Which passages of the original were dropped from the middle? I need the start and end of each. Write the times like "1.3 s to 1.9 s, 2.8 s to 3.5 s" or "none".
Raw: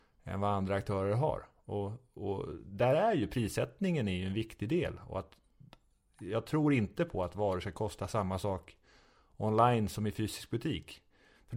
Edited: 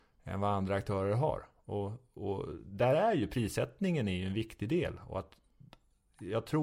none